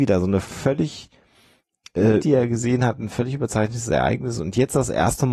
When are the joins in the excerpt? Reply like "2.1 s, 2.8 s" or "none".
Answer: 2.2 s